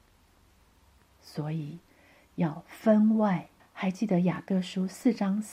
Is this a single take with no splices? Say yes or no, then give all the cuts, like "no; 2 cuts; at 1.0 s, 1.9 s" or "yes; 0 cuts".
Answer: no; 1 cut; at 3.6 s